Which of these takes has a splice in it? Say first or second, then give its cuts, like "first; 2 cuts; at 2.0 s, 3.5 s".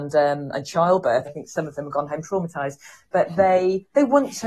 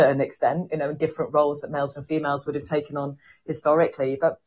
first; 1 cut; at 1.2 s